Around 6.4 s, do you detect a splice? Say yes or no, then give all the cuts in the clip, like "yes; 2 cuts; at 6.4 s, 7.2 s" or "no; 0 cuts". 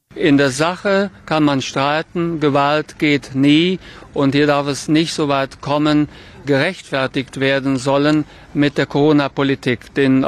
yes; 1 cut; at 6.4 s